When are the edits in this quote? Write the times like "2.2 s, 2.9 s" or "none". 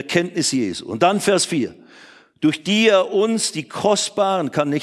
none